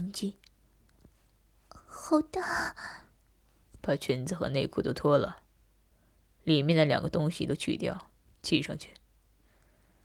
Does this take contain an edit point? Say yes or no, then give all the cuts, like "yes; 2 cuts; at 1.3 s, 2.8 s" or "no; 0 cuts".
no; 0 cuts